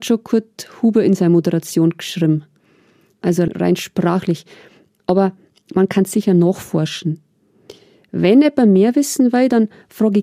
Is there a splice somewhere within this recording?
no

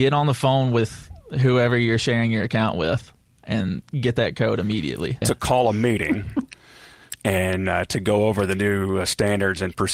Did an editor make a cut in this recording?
yes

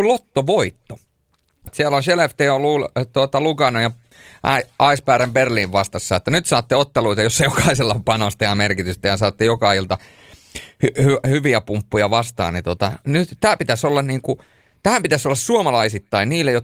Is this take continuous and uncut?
no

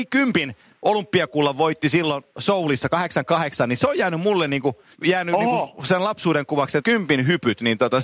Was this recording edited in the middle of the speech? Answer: yes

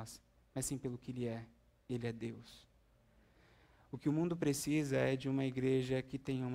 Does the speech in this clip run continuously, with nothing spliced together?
yes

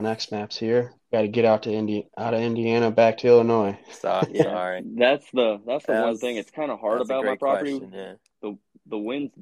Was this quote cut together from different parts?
yes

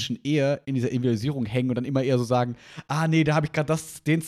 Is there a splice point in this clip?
no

